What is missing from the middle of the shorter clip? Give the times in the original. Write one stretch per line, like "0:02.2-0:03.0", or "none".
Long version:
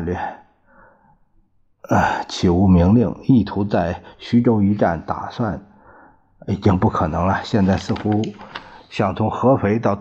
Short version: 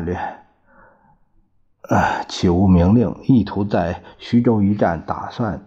none